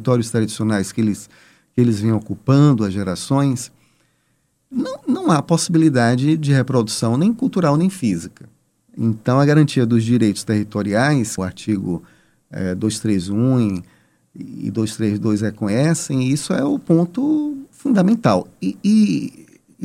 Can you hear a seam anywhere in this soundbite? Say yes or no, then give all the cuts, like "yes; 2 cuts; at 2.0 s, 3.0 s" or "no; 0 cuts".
yes; 2 cuts; at 8.8 s, 11.4 s